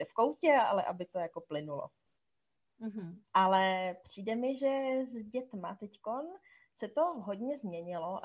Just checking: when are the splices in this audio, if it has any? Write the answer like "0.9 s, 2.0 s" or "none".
3.2 s